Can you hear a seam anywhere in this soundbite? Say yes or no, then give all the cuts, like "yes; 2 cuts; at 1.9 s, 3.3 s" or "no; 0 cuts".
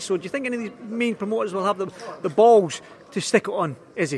no; 0 cuts